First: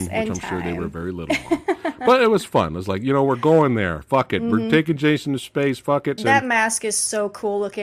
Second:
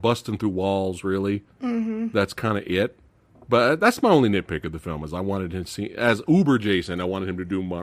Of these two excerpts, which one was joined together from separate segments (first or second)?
first